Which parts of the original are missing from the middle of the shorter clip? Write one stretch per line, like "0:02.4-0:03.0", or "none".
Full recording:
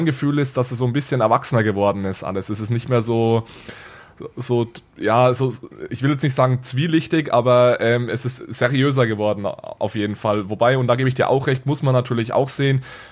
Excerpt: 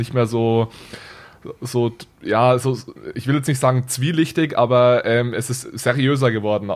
none